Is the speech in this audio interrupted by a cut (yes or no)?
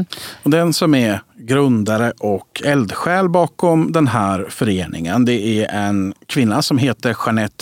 no